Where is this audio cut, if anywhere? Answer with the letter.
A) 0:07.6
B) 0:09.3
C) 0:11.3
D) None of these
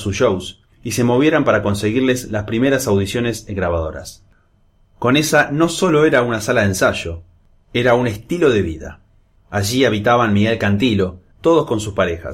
C